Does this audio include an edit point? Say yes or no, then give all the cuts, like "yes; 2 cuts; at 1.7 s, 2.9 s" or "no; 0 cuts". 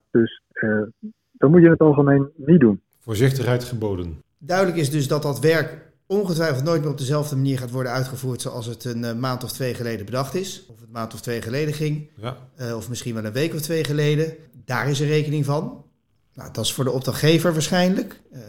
no; 0 cuts